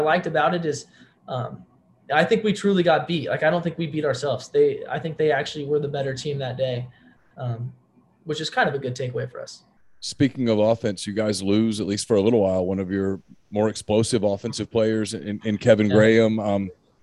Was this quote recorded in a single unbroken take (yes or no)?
yes